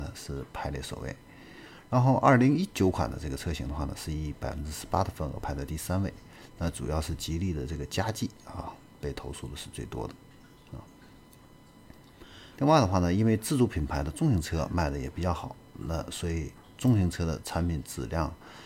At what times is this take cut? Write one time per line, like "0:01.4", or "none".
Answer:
0:12.5